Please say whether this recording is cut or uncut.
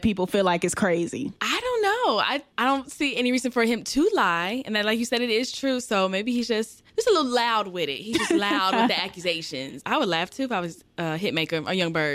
cut